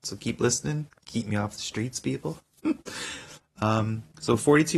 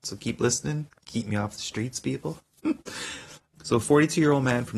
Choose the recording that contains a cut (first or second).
second